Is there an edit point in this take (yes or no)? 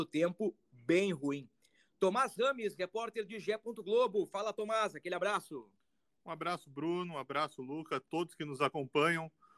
no